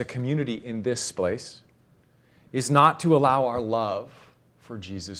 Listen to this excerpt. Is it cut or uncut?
uncut